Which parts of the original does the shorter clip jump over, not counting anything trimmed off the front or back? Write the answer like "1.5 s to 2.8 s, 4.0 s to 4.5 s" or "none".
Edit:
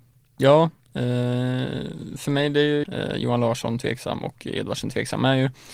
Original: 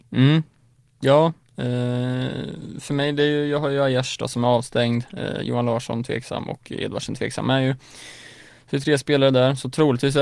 3.5 s to 5.1 s